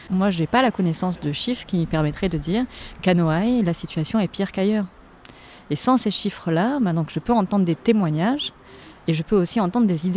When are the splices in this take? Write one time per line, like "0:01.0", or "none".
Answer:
none